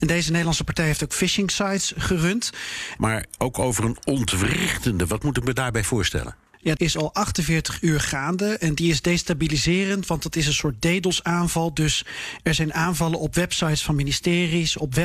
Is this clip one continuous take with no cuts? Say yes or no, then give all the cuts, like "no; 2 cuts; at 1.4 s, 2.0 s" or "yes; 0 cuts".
no; 2 cuts; at 3.0 s, 6.8 s